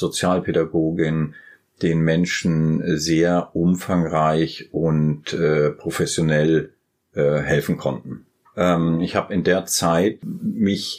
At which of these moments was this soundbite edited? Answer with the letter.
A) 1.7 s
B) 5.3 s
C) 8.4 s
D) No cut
C